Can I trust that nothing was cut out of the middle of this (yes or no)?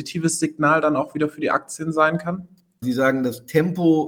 no